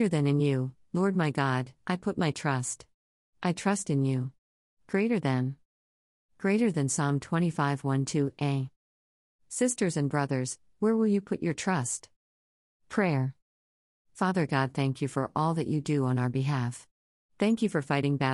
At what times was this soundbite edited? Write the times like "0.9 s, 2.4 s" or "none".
none